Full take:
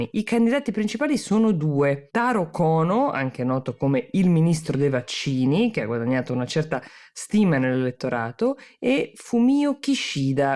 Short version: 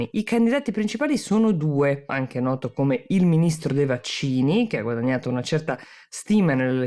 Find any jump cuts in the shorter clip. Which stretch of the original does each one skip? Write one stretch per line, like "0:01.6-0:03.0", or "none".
0:02.1-0:03.1